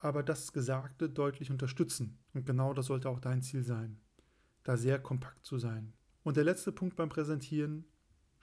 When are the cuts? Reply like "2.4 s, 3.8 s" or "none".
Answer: 2.2 s